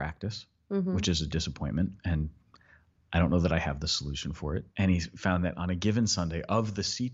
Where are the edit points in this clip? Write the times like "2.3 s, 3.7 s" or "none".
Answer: 4.7 s